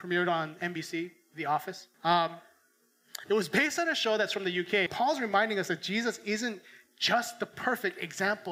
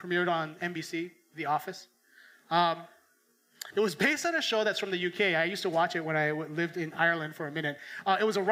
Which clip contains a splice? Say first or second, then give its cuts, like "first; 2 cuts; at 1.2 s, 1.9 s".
first; 2 cuts; at 1.9 s, 4.9 s